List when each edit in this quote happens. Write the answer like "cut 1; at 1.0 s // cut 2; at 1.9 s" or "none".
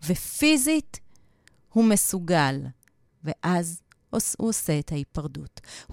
cut 1; at 3.1 s